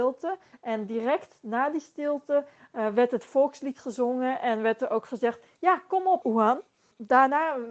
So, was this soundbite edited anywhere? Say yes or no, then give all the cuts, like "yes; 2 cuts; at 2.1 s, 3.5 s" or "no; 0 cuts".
yes; 1 cut; at 6.2 s